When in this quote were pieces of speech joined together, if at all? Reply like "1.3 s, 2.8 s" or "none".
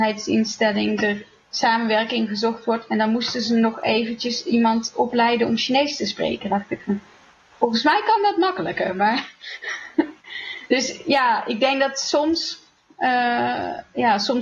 none